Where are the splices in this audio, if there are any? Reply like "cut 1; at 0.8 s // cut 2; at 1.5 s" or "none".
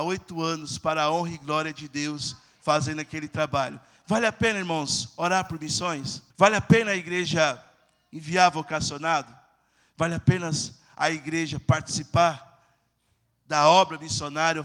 cut 1; at 6.3 s